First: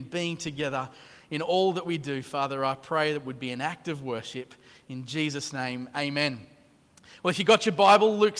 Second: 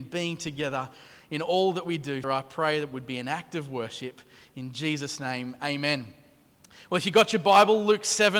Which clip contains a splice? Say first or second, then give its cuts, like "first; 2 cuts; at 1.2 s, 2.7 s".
second; 1 cut; at 2.2 s